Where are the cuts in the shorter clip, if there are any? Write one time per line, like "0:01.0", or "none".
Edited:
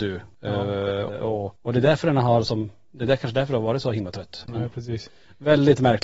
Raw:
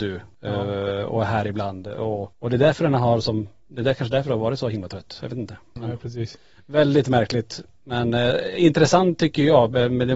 0:01.1
0:04.4